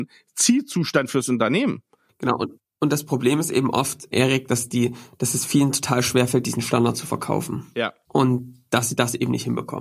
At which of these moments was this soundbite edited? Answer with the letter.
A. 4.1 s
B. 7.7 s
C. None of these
A